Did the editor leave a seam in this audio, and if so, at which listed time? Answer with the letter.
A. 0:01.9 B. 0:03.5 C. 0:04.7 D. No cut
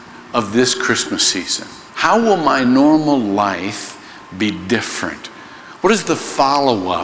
A